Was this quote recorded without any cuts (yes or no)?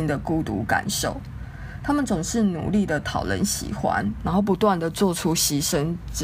yes